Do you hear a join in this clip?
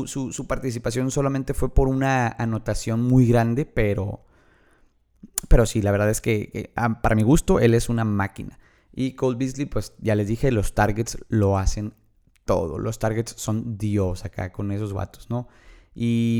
no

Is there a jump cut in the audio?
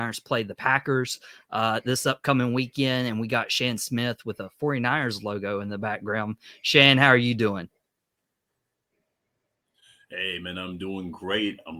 no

